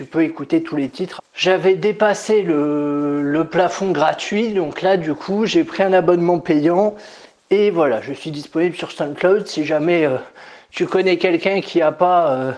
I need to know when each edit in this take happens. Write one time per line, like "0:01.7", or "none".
0:01.2